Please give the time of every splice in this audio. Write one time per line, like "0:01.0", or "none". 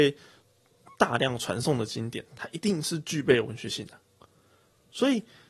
none